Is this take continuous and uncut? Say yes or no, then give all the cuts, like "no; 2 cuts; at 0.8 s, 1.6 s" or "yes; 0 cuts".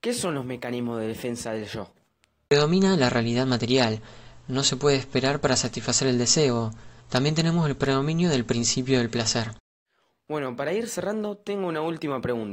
no; 1 cut; at 7.0 s